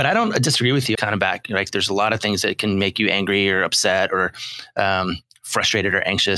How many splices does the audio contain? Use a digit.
1